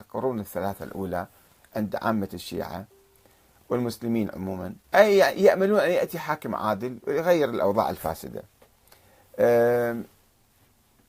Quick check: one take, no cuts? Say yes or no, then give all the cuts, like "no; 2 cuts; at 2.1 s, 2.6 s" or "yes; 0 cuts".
no; 1 cut; at 4.8 s